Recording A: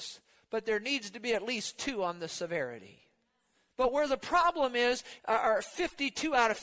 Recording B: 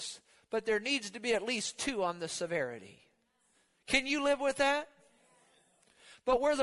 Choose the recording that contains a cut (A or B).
A